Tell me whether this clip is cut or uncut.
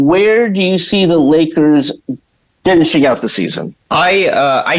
cut